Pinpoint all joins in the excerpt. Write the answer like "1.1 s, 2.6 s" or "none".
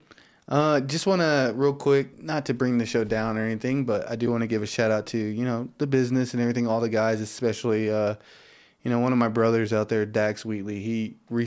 2.1 s